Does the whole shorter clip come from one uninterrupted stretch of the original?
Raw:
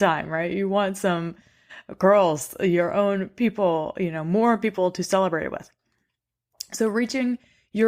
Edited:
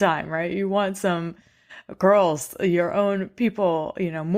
yes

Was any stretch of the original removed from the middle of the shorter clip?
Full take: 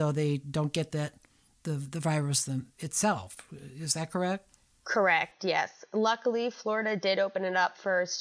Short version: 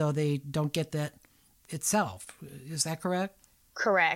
yes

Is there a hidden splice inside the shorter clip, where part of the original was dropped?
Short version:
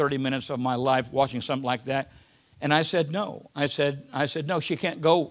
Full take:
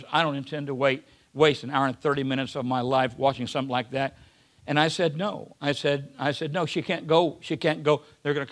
no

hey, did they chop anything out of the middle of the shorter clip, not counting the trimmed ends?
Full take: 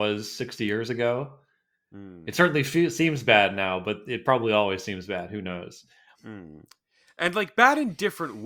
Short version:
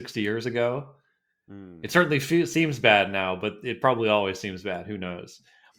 no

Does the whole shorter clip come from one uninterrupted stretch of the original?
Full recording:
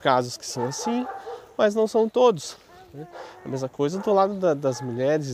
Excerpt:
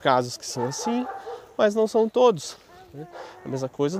yes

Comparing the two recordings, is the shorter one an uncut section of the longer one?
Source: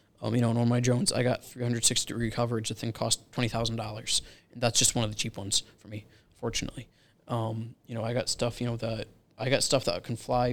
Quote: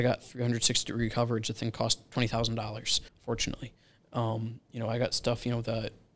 no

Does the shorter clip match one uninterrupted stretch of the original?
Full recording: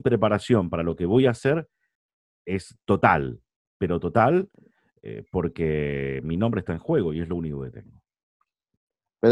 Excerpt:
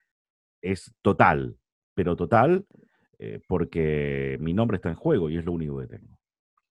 yes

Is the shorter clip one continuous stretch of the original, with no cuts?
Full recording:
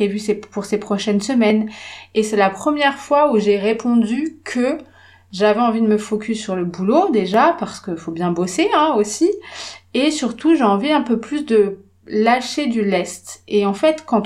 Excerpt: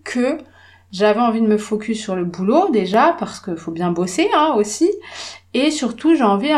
yes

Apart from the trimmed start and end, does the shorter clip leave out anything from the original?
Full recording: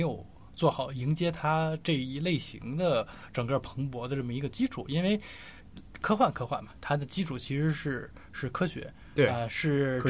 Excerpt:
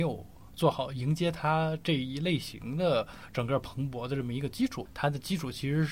yes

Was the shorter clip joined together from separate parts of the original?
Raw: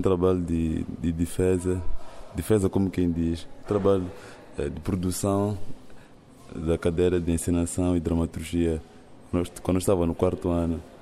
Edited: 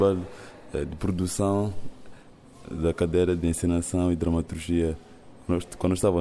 no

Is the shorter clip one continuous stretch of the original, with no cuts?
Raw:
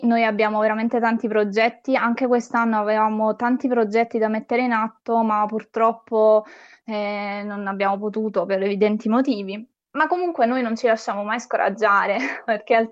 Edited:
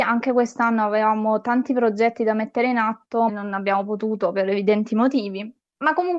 no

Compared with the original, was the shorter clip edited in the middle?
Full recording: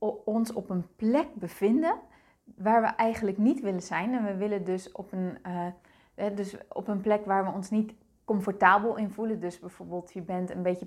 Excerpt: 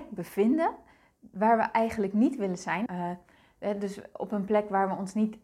yes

